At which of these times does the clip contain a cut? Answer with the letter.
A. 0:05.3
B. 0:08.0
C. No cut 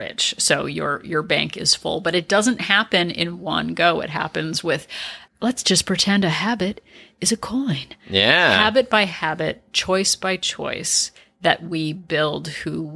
A